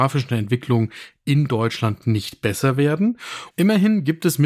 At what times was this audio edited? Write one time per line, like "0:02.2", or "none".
0:03.5

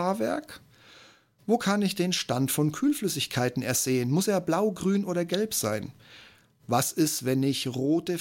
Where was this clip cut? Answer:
none

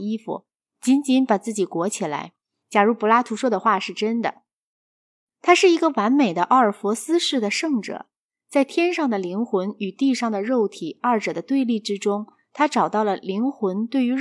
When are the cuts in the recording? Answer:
0:02.6

